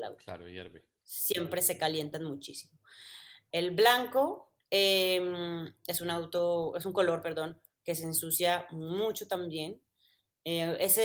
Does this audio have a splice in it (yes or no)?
no